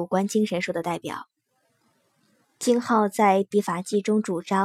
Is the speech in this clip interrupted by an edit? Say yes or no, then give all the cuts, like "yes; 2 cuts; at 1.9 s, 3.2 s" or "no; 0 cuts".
yes; 1 cut; at 2.4 s